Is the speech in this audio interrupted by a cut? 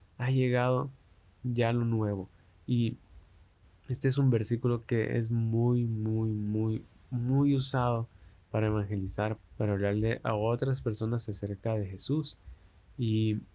yes; 1 cut; at 9.4 s

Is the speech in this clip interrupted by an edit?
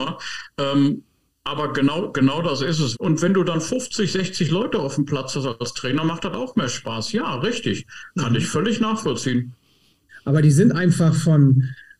yes; 2 cuts; at 2.9 s, 10.1 s

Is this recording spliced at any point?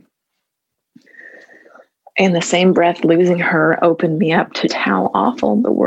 yes; 1 cut; at 4.7 s

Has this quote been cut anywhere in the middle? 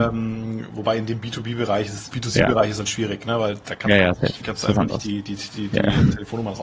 yes; 1 cut; at 2.1 s

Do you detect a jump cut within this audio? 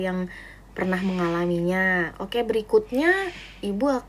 yes; 1 cut; at 2.1 s

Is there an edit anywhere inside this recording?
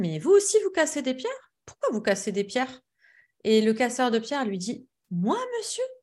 no; 0 cuts

